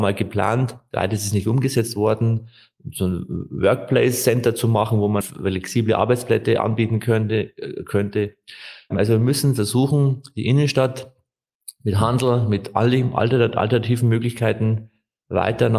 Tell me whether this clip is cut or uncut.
cut